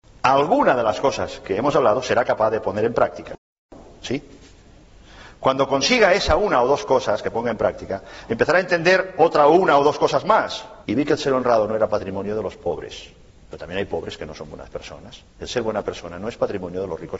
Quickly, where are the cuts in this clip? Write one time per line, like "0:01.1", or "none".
0:10.8
0:13.4
0:15.3

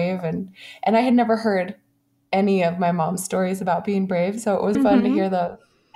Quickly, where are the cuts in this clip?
0:04.7

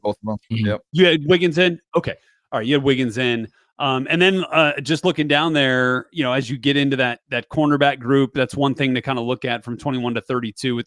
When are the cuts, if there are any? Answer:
none

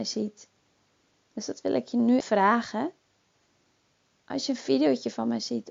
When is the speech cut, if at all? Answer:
0:02.2

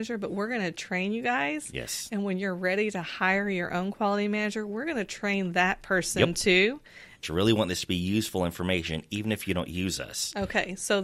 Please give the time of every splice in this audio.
0:07.2

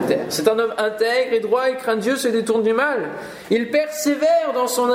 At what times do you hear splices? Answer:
none

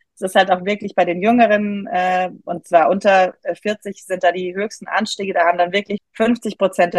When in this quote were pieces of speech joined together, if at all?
0:06.0

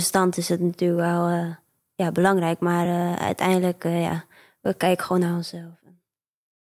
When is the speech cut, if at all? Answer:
none

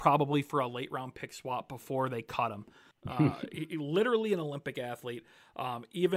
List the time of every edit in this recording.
0:02.9

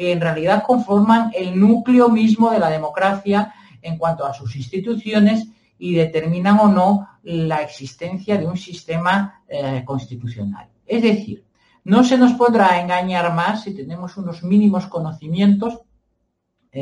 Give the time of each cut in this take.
none

